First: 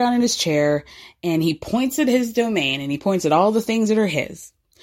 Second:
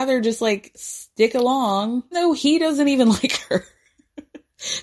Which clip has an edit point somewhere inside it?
second; 1 cut; at 2.1 s

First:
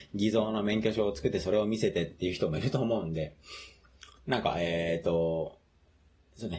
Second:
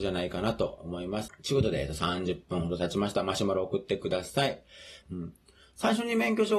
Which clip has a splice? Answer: second; 2 cuts; at 1.3 s, 5.0 s

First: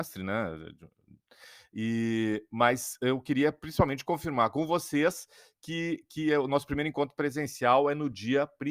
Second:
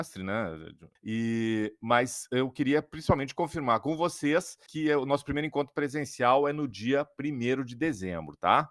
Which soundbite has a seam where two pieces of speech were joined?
second; 2 cuts; at 1.0 s, 4.7 s

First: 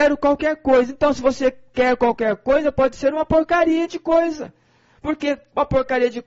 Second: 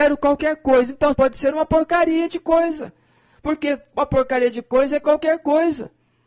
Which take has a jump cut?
second; 1 cut; at 1.1 s

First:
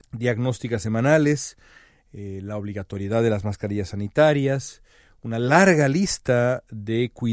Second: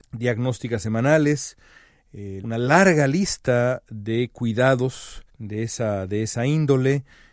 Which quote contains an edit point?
second; 2 cuts; at 2.4 s, 5.3 s

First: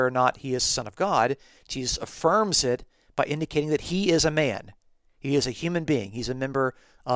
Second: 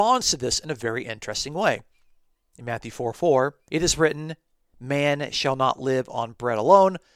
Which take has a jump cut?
second; 1 cut; at 3.7 s

